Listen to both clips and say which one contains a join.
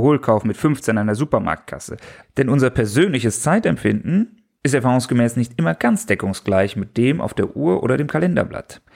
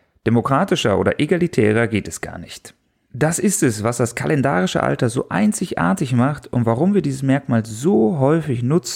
first; 1 cut; at 2.2 s

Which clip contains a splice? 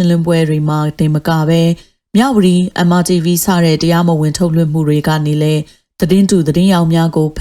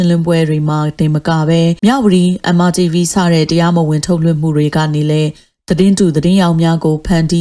second; 1 cut; at 1.8 s

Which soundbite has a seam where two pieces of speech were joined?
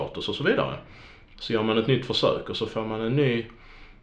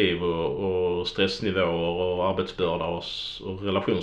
first; 1 cut; at 1.3 s

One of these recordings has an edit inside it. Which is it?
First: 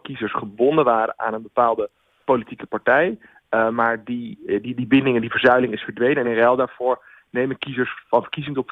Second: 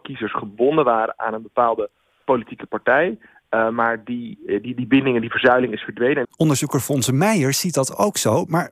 second; 1 cut; at 6.2 s

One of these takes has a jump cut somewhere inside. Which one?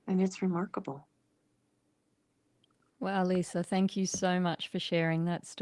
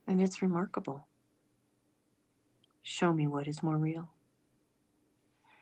second; 1 cut; at 2.7 s

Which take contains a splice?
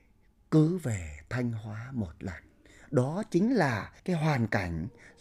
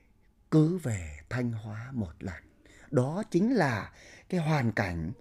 first; 1 cut; at 4.0 s

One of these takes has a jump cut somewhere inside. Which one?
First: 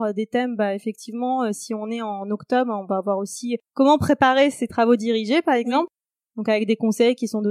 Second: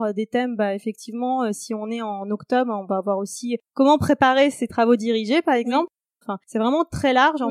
second; 1 cut; at 6.2 s

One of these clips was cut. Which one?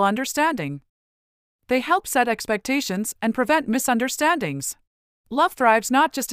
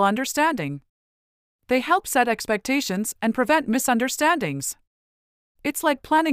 first; 1 cut; at 5.2 s

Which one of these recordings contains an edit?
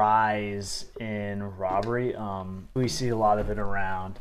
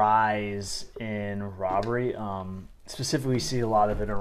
first; 1 cut; at 2.8 s

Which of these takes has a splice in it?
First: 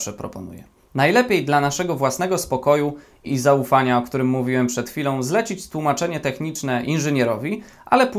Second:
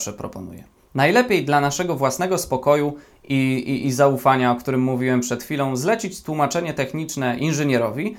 first; 1 cut; at 3.3 s

